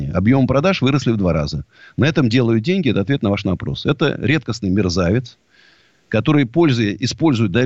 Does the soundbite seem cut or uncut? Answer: uncut